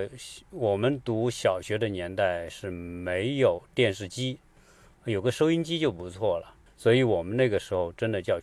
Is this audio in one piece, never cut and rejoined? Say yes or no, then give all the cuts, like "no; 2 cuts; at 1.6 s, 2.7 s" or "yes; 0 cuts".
no; 1 cut; at 6.7 s